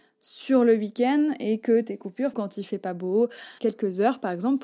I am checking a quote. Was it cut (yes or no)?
yes